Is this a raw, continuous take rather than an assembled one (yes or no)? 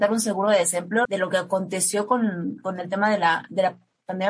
no